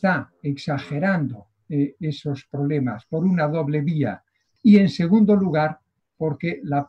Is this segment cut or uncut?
cut